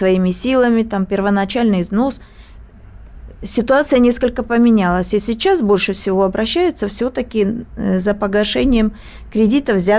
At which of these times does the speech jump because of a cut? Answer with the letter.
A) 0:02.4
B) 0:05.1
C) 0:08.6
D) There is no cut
D